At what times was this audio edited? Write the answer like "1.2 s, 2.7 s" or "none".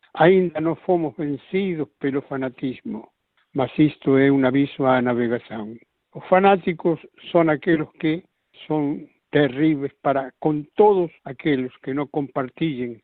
6.0 s, 11.2 s